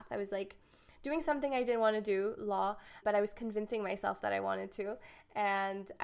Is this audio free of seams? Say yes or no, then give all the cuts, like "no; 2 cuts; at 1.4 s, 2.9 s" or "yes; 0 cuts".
no; 1 cut; at 3.0 s